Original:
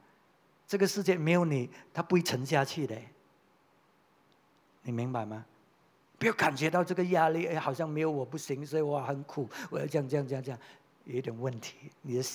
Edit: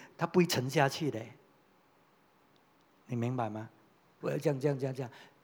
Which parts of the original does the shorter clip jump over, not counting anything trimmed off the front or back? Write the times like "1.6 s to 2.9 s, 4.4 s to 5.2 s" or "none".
6.0 s to 9.7 s